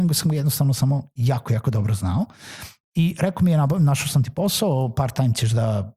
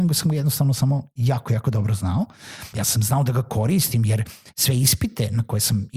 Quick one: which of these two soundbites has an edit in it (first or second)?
second